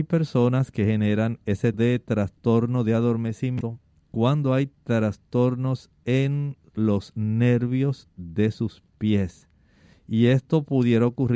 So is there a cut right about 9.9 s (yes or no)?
no